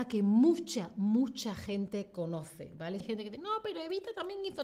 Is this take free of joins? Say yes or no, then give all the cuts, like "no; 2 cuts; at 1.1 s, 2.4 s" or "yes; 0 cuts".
no; 1 cut; at 3.0 s